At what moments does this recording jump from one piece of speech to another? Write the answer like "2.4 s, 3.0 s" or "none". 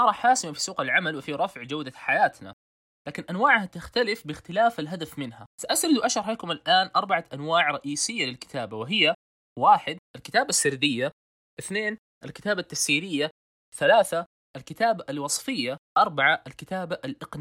5.5 s, 10.0 s, 15.9 s